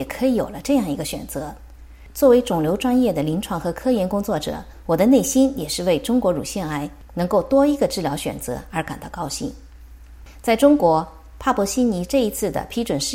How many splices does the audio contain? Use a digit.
0